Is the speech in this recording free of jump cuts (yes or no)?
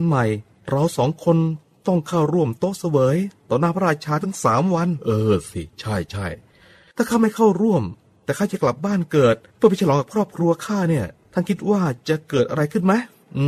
yes